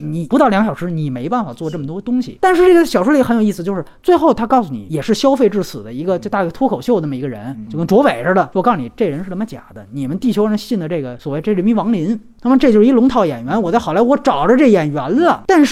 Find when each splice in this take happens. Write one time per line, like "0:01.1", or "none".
none